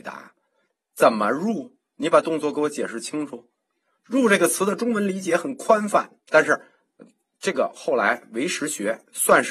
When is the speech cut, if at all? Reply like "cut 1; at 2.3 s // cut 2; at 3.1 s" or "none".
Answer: cut 1; at 6.2 s